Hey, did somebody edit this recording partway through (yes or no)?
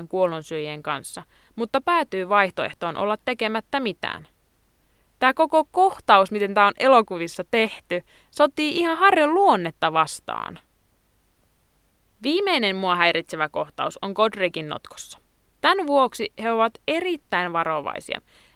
yes